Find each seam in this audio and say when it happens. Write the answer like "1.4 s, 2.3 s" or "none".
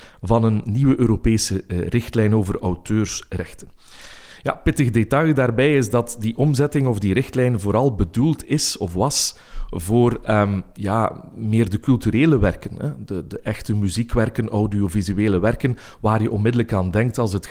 none

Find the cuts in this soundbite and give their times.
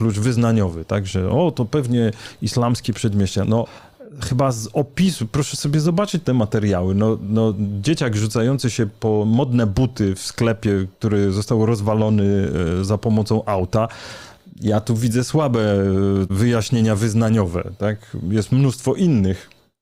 none

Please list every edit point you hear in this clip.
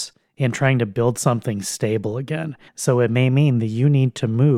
2.7 s

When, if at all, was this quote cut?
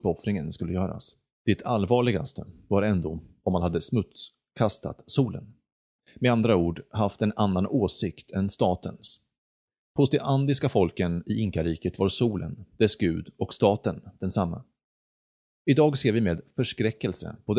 1.3 s

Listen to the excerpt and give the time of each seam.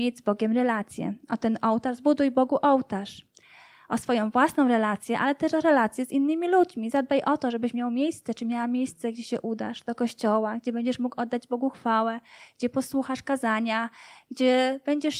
none

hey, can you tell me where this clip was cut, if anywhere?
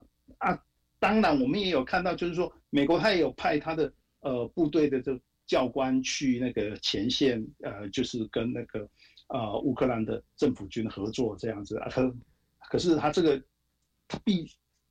none

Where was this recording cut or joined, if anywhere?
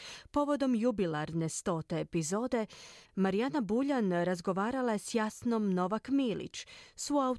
none

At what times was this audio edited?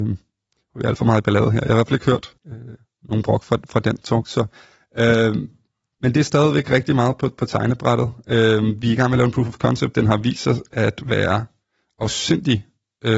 2.4 s

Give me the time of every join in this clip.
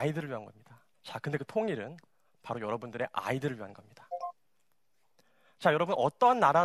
0.9 s

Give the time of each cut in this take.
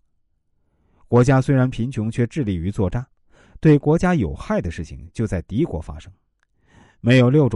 none

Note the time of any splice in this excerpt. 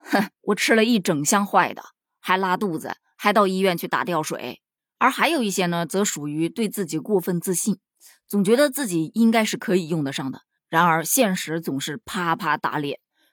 none

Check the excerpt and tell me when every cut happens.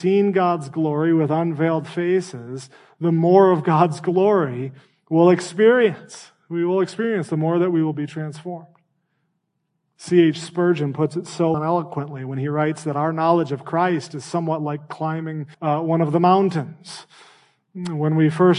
11.5 s, 15.5 s

